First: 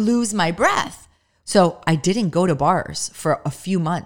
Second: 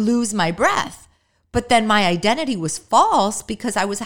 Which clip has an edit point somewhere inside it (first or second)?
first